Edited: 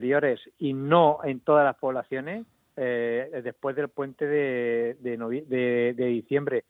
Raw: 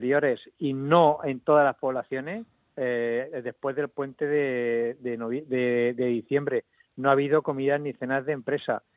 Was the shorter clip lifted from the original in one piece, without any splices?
yes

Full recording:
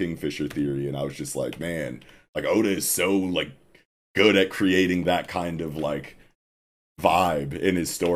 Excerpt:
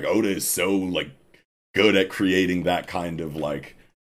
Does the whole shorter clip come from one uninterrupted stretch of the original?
yes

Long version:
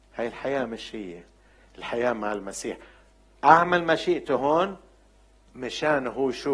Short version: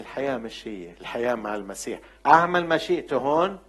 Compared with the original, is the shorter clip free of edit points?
no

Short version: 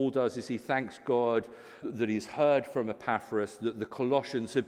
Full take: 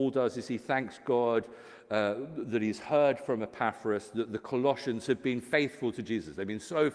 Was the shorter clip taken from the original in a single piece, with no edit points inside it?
no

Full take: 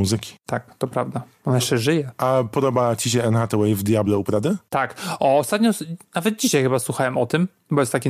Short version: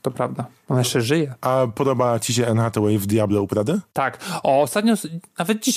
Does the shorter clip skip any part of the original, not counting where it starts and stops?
no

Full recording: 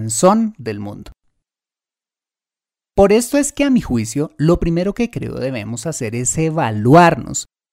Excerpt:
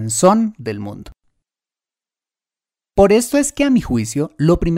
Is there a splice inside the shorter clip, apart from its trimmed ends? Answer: no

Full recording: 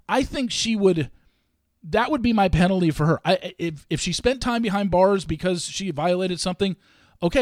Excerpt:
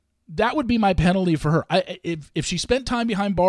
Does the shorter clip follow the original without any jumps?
yes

